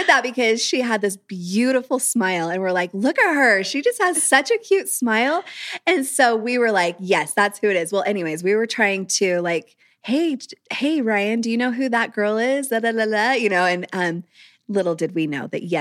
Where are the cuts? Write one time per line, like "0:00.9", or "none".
none